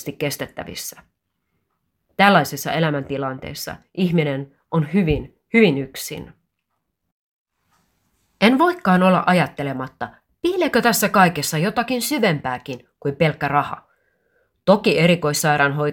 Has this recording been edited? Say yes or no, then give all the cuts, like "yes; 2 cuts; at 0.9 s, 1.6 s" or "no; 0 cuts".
no; 0 cuts